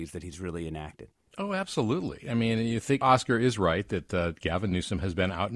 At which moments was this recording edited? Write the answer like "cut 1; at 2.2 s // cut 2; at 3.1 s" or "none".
cut 1; at 3.0 s